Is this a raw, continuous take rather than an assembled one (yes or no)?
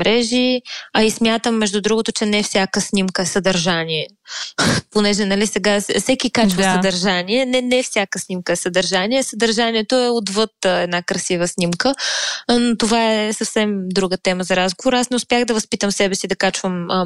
yes